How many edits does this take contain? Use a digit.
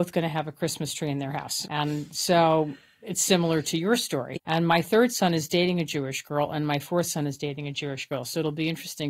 2